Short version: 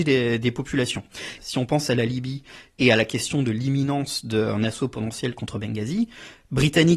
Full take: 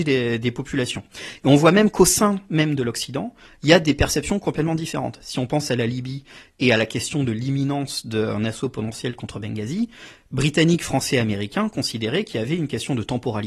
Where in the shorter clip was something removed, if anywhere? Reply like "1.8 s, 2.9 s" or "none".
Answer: 1.4 s